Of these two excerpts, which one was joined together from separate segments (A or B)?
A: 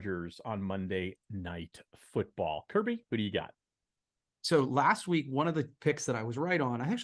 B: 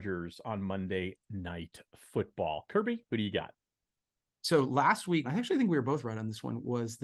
B